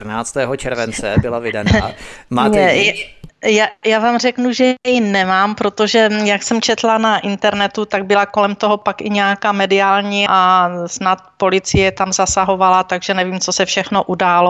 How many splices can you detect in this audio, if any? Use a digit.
1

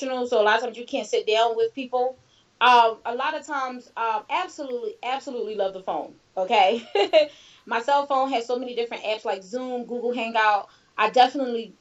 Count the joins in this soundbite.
1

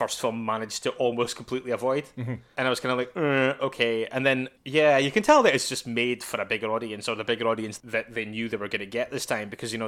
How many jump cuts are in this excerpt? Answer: 0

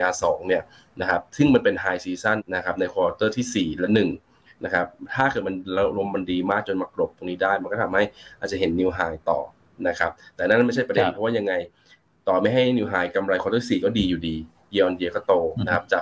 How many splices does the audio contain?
1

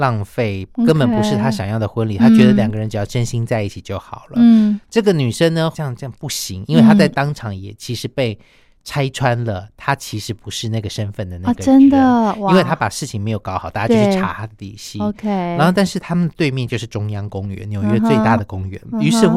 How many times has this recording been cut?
1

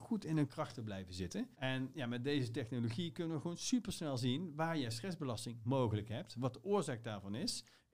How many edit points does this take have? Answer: 1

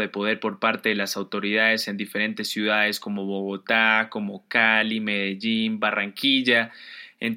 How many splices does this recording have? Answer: 0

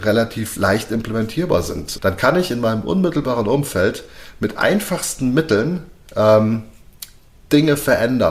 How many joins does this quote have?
1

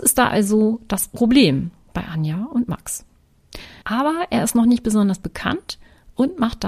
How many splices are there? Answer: 1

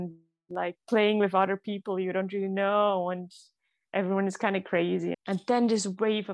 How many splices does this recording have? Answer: 1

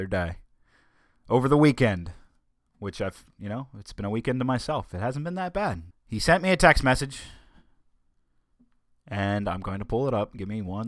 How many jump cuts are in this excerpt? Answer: 1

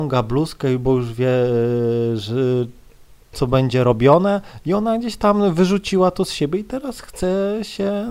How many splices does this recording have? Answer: 0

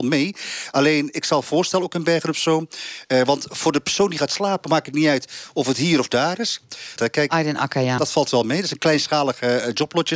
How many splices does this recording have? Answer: 2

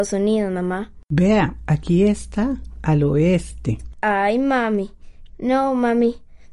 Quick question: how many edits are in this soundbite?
3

